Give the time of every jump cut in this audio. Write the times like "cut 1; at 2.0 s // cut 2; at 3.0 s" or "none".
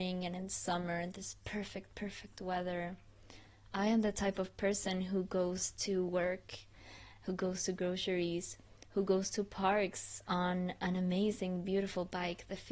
none